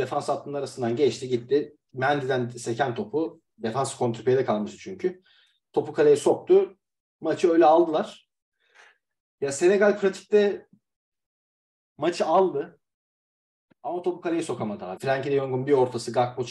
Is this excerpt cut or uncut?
cut